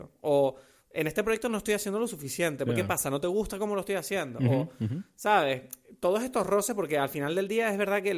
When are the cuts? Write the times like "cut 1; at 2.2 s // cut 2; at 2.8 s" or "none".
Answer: none